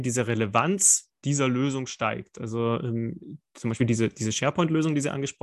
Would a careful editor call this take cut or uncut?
uncut